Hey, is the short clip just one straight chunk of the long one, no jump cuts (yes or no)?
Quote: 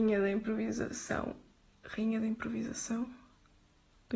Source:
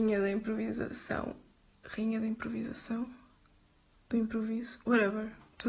yes